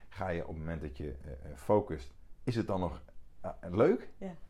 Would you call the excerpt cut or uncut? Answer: uncut